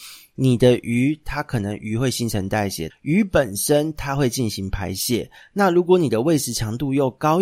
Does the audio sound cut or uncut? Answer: cut